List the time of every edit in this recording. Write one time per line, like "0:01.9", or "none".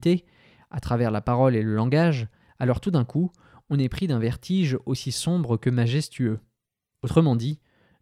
none